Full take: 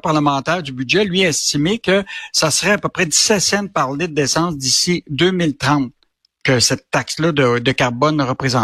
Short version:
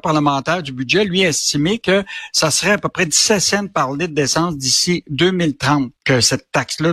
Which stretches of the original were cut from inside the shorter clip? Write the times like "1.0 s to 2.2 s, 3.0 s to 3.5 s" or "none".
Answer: 6.0 s to 6.4 s